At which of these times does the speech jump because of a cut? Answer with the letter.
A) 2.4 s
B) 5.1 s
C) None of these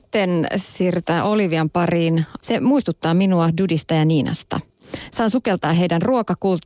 A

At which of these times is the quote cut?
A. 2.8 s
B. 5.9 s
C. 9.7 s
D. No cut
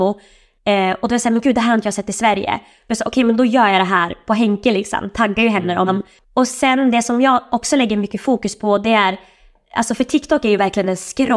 B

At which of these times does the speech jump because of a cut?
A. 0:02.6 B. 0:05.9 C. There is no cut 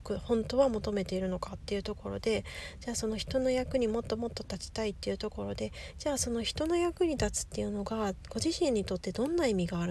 C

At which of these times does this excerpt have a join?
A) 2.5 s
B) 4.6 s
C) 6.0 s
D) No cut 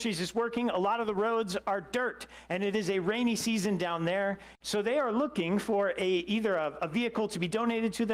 B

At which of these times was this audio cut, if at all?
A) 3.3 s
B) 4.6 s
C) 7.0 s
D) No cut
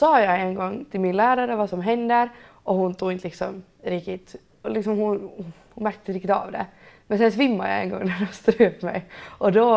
B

